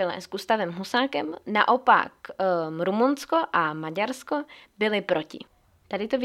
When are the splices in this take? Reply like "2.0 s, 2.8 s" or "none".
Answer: none